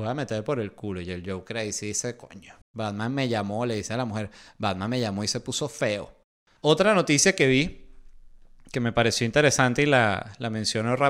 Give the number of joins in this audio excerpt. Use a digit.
2